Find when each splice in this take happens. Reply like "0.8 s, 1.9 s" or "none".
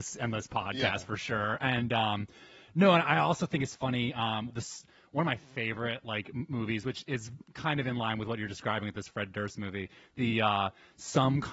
4.5 s